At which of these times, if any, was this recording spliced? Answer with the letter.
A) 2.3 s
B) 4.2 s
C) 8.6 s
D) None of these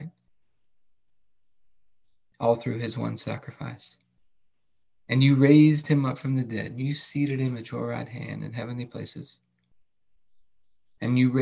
D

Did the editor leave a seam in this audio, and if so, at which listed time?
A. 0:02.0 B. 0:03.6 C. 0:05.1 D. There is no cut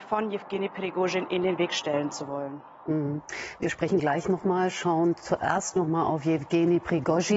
D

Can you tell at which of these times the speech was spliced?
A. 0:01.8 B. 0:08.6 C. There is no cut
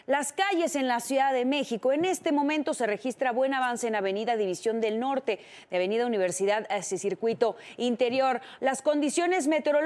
B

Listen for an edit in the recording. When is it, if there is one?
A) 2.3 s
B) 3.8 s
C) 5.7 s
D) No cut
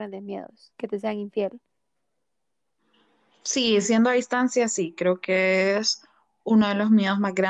D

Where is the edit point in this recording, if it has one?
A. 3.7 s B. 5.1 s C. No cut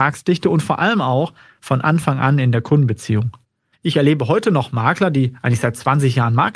A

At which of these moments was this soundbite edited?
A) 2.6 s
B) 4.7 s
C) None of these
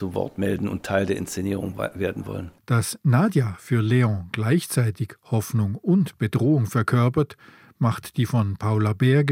A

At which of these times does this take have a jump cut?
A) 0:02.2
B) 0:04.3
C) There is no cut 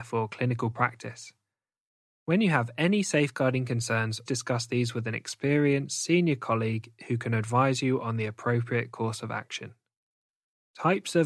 B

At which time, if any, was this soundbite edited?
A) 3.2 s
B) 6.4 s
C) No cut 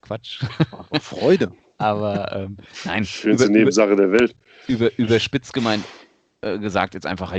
A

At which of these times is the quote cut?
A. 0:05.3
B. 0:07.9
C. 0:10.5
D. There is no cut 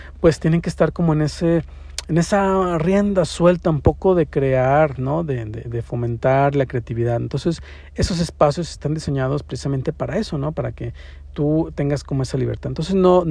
D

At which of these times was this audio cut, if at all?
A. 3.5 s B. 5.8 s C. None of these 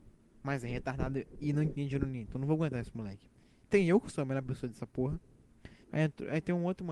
B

